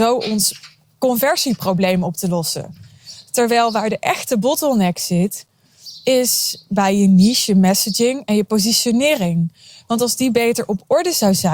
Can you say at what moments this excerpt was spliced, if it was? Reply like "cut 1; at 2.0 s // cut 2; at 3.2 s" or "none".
none